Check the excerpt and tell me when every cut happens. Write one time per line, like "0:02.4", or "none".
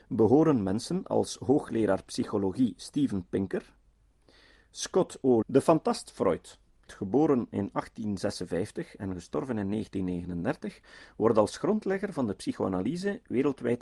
0:05.4
0:06.9

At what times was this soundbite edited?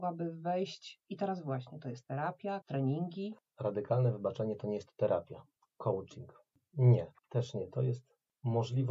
0:02.6
0:07.2

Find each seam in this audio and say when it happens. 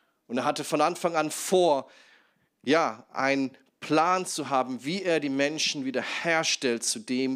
none

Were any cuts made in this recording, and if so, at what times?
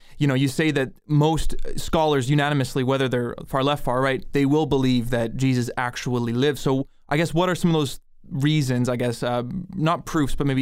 none

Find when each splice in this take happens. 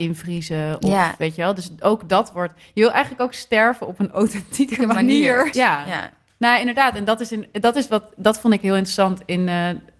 0:05.5

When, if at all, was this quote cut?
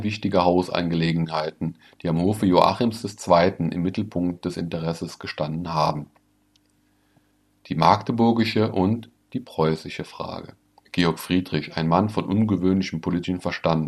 0:10.8

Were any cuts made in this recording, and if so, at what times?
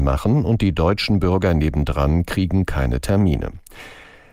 none

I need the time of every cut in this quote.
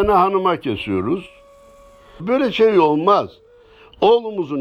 0:02.2

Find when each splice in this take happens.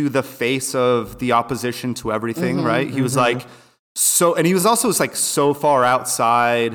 none

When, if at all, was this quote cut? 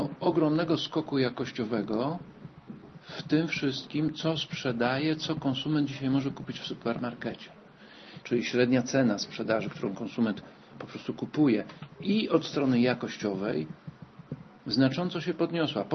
0:08.2

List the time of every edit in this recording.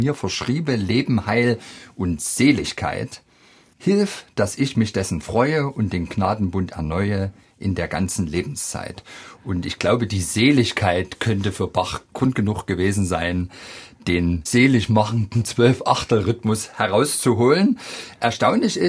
0:14.5

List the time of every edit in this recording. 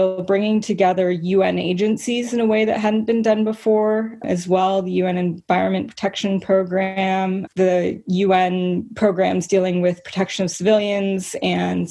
0:07.5

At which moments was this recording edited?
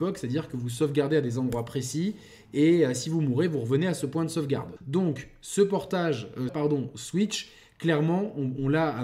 0:04.8
0:06.5

